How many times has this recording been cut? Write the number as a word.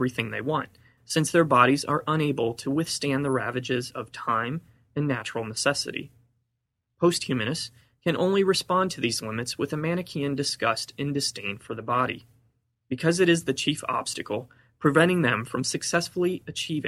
one